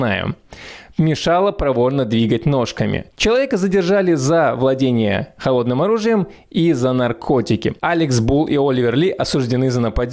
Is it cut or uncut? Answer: cut